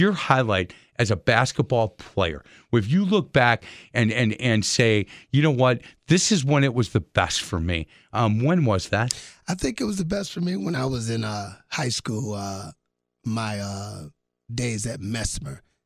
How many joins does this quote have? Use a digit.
0